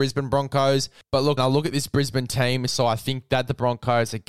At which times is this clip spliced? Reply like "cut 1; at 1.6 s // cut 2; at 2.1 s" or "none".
cut 1; at 1.4 s // cut 2; at 2.7 s